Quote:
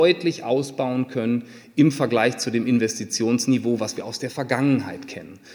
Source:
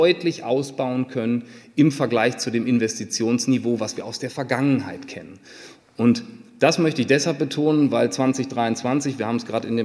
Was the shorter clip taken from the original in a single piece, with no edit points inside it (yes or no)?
yes